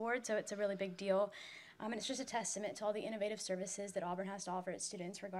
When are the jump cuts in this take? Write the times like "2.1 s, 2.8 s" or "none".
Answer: none